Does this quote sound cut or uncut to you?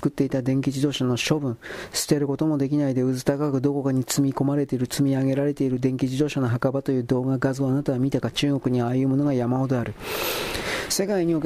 uncut